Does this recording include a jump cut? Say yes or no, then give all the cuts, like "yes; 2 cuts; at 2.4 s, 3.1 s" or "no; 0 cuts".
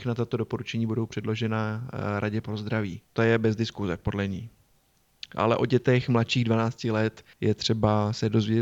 yes; 2 cuts; at 3.1 s, 7.3 s